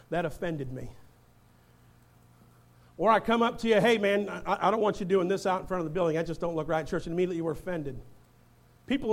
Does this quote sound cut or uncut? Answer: uncut